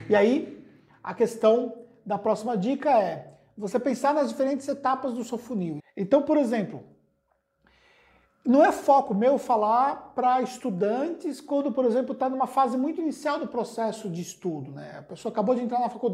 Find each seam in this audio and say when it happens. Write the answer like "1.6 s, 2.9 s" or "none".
5.8 s